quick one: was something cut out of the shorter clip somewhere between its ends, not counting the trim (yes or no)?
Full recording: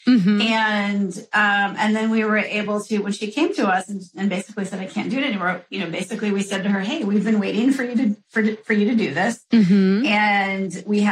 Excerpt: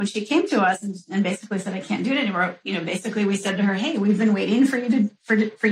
no